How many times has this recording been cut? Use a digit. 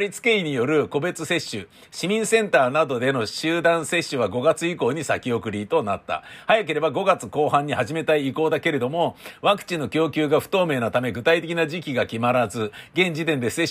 0